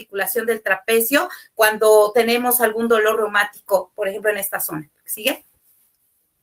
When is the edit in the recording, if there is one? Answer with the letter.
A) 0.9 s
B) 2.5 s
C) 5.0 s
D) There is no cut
D